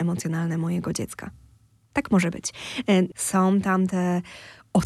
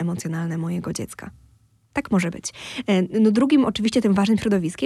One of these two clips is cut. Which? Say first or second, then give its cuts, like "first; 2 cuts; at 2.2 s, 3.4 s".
first; 1 cut; at 3.1 s